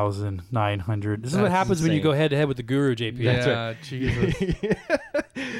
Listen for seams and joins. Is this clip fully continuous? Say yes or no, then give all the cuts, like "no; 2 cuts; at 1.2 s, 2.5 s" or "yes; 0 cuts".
yes; 0 cuts